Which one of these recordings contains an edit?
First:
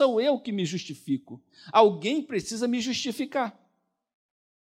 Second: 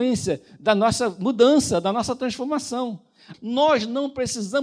second; 1 cut; at 3.3 s

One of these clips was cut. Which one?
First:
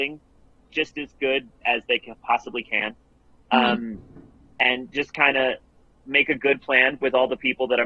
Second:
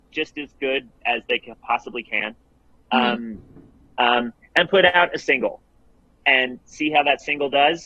second; 1 cut; at 4.0 s

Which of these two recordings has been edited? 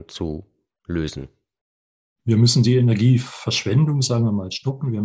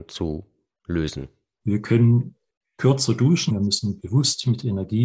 second; 2 cuts; at 1.6 s, 3.5 s

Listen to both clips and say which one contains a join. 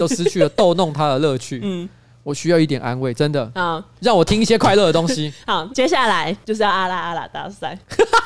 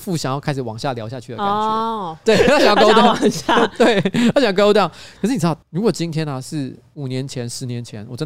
second; 1 cut; at 2.2 s

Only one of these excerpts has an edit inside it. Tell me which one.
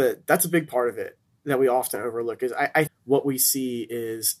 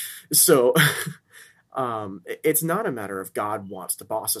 first; 1 cut; at 2.9 s

